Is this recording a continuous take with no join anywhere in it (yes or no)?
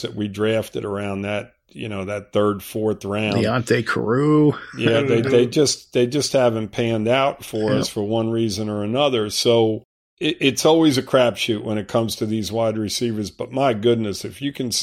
yes